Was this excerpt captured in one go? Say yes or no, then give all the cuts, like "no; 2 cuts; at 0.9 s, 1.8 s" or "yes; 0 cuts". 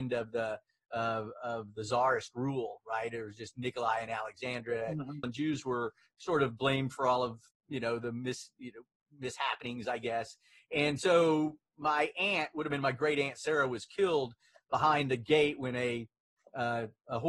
no; 1 cut; at 5.2 s